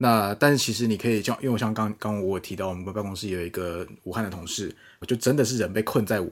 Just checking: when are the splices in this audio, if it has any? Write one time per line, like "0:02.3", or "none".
0:05.0